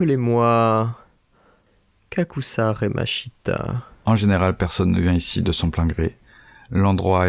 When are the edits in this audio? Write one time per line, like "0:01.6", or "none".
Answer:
0:04.0